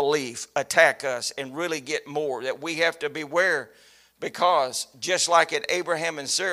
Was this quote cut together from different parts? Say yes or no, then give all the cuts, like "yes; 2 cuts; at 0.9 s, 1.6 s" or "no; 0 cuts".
no; 0 cuts